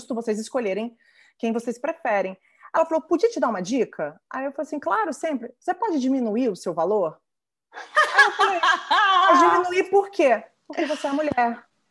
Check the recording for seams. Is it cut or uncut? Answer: uncut